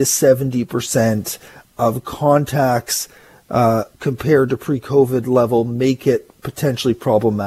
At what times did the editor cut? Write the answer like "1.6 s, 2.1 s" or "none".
3.9 s